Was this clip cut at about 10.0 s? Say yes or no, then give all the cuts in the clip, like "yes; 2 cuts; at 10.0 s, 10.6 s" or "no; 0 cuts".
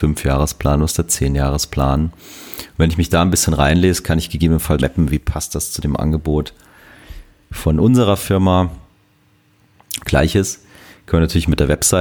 yes; 2 cuts; at 4.8 s, 10.0 s